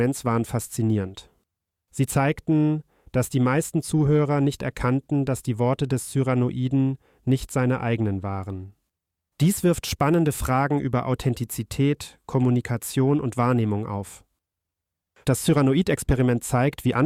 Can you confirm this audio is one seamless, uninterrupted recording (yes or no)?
no